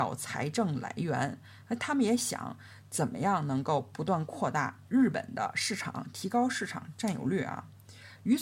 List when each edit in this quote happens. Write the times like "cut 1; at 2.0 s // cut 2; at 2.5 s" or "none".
cut 1; at 4.8 s